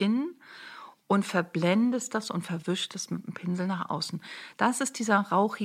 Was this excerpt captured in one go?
yes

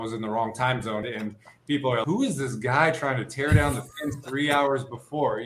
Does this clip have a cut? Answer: yes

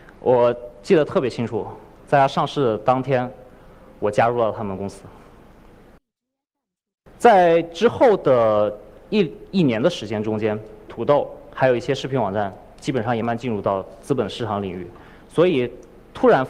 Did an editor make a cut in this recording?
yes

